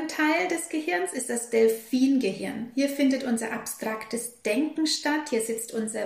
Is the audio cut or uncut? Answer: uncut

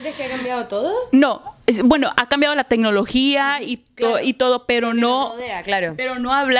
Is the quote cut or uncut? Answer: uncut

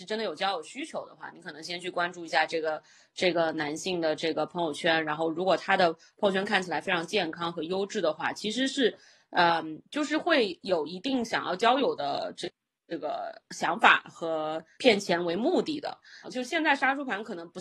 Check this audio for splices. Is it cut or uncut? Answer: cut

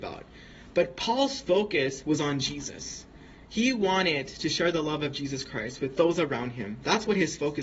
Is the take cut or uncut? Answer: uncut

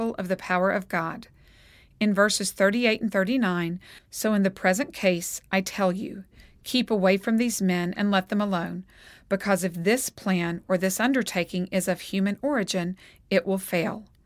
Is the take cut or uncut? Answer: cut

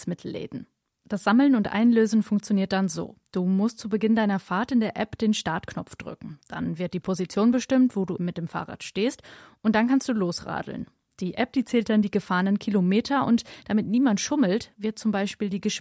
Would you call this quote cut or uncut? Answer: cut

